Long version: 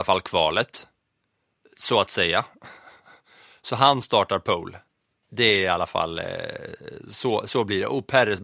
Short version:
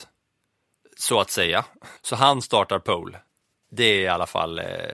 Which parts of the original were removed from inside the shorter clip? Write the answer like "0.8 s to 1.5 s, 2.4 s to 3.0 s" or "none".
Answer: 2.8 s to 3.6 s